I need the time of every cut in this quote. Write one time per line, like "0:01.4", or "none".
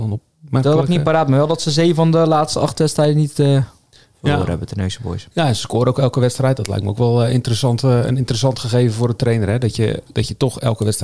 0:10.1